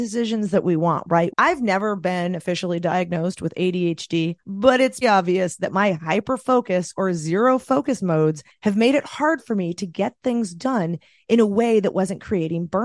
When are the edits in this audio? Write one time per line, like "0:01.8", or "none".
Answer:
0:01.3
0:05.0